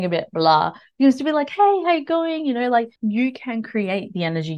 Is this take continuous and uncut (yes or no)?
no